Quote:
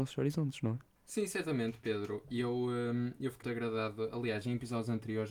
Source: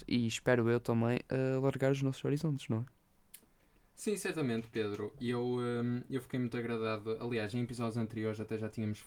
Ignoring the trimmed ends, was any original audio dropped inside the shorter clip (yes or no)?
yes